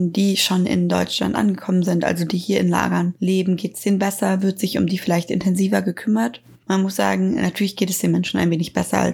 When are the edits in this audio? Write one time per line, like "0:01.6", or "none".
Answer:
none